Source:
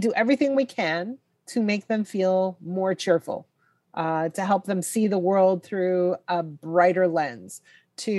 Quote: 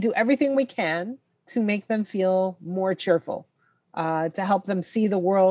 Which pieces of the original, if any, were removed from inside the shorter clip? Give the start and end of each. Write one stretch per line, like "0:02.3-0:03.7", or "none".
none